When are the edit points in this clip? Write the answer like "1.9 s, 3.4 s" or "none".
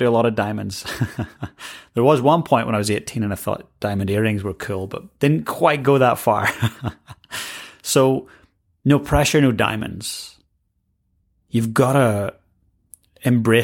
none